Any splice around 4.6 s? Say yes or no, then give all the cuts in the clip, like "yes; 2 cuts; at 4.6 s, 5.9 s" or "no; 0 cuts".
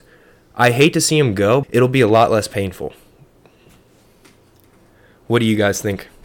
no; 1 cut; at 1.6 s